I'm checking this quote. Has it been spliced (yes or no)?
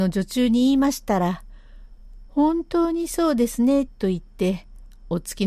no